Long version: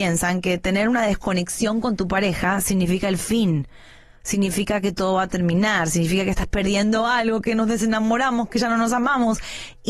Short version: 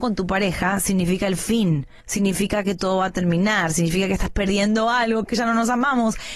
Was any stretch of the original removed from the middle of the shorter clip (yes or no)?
yes